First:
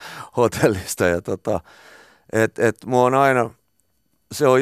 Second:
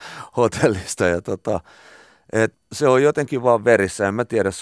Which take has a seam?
second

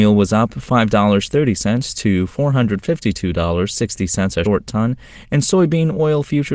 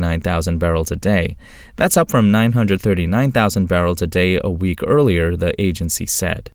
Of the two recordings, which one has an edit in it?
first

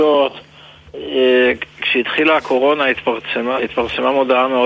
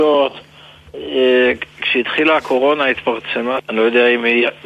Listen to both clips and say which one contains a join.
second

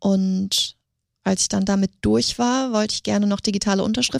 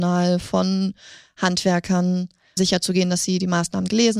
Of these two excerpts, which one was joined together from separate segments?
second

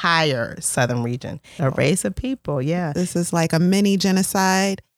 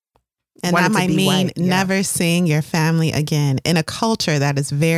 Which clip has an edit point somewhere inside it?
first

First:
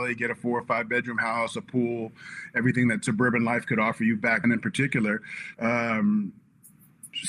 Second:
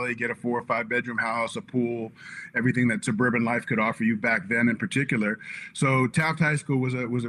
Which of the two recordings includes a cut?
first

